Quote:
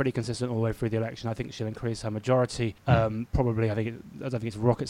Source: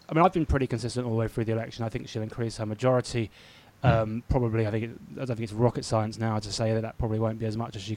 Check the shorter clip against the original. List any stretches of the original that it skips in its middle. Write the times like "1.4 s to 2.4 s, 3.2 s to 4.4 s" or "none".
3.3 s to 3.7 s